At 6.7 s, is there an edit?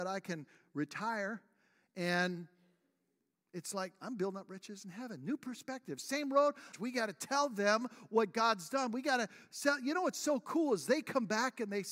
yes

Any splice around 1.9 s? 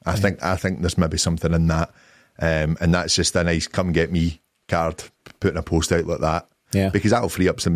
no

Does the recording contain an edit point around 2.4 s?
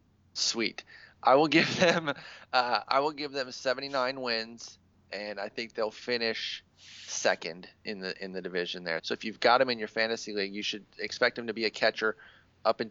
no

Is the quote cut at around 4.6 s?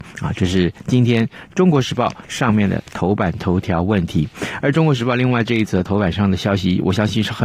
no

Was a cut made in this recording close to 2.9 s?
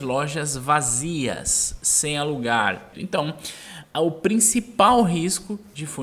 yes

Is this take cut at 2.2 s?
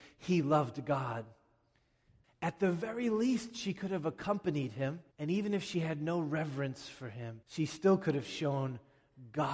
yes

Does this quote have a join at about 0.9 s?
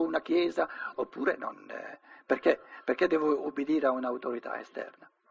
yes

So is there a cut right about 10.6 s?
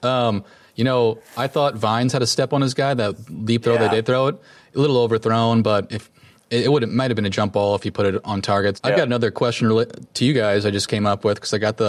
no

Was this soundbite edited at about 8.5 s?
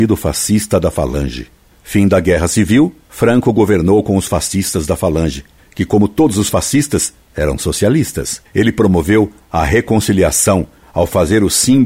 no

